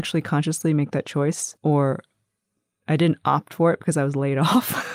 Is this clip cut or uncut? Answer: cut